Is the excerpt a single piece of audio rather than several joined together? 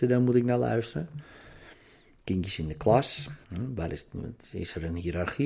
no; 1 cut; at 3.4 s

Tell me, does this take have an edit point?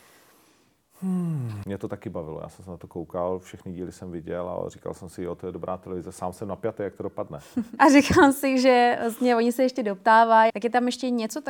yes; 3 cuts; at 1.6 s, 7.8 s, 10.5 s

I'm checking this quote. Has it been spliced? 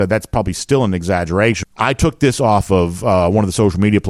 yes; 1 cut; at 1.6 s

